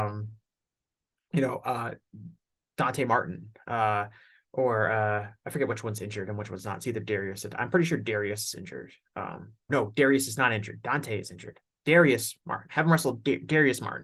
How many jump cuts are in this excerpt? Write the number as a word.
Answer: one